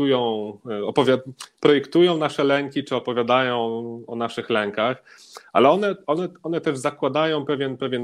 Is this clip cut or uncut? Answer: uncut